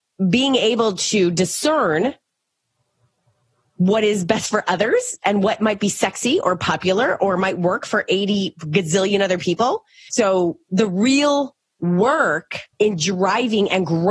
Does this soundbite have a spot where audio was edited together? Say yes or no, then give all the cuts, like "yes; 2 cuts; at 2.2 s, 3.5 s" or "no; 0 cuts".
yes; 2 cuts; at 10.1 s, 12.7 s